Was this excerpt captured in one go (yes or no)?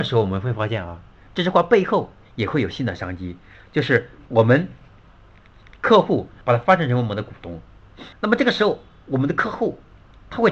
no